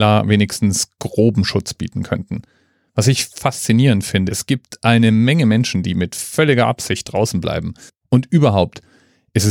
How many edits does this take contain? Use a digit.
2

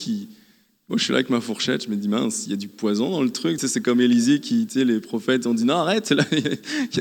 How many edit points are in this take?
0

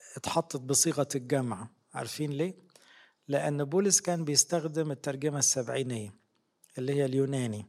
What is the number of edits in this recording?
0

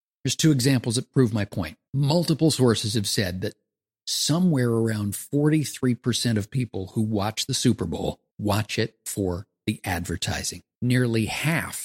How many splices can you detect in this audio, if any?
3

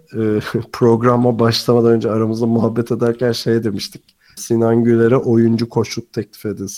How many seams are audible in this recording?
1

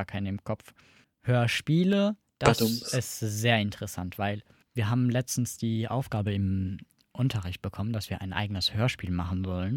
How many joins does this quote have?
1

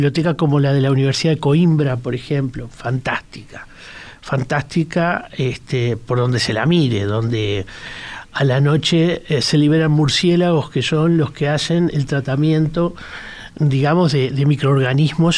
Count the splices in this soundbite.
0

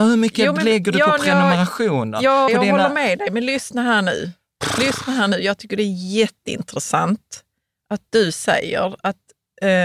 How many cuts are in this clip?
1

